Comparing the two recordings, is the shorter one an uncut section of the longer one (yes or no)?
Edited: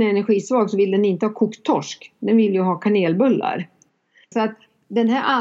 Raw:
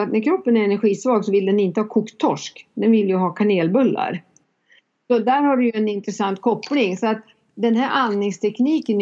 no